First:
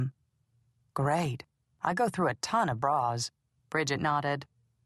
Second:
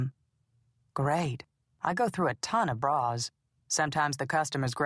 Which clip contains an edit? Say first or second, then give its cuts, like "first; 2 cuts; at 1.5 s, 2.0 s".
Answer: first; 1 cut; at 3.6 s